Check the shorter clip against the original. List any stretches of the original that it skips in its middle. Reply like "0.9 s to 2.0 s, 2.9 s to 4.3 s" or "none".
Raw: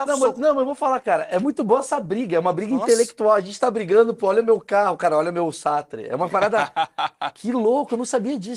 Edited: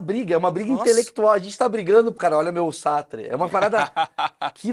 4.2 s to 5.0 s